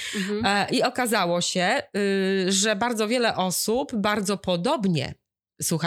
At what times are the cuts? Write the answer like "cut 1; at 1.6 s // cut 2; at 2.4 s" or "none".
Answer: none

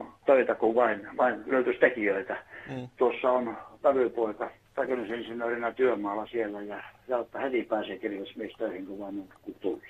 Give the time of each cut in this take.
none

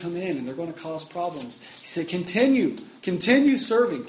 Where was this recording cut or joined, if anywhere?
none

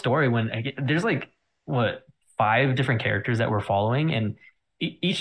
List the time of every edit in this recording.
none

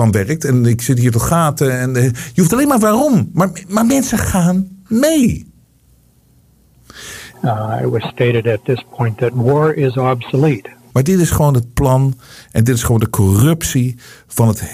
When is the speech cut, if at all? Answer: cut 1; at 7.3 s // cut 2; at 10.9 s

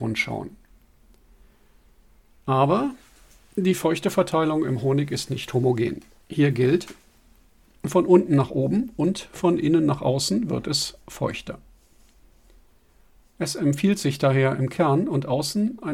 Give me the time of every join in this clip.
none

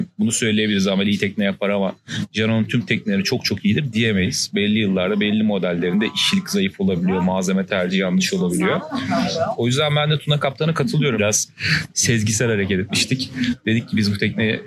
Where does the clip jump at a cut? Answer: cut 1; at 11.2 s

